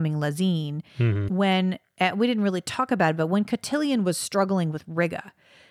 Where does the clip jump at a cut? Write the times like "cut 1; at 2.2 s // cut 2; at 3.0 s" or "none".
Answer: cut 1; at 1.3 s